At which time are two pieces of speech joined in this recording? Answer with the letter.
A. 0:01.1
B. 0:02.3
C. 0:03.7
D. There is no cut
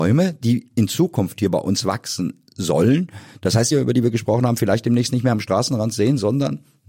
C